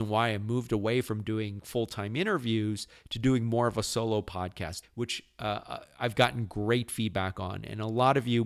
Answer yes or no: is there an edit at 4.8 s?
yes